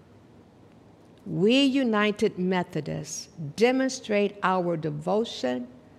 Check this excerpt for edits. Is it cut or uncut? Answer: uncut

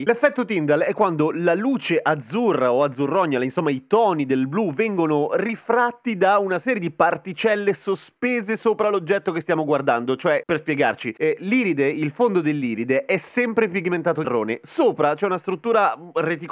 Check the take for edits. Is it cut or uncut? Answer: cut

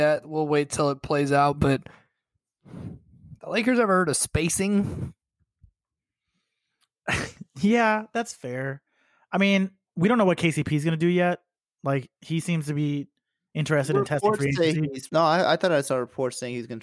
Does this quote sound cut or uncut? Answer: cut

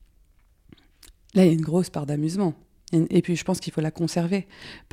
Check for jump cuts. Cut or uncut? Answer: uncut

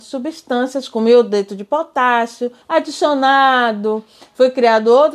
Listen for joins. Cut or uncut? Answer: cut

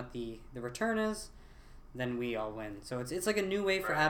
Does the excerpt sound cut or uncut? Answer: uncut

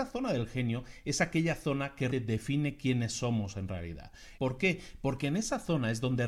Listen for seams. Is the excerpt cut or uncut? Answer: cut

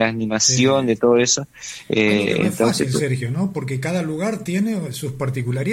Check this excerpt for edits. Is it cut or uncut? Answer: uncut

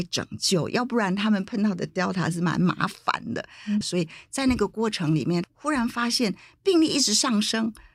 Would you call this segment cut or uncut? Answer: cut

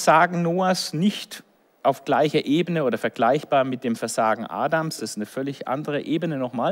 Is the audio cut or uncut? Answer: uncut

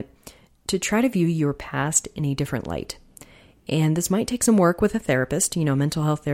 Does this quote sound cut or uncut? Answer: uncut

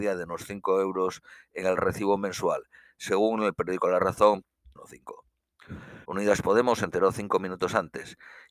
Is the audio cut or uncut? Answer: cut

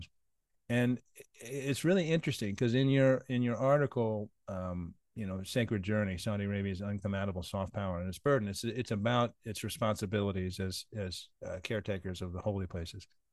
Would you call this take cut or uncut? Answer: uncut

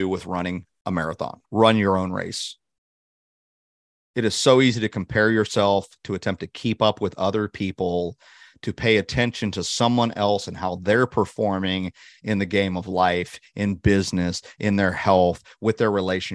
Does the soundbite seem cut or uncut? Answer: cut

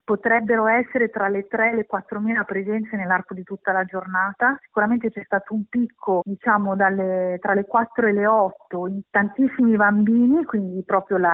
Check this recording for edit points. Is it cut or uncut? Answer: uncut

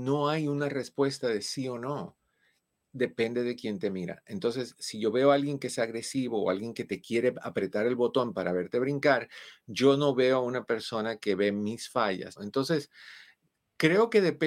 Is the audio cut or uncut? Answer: cut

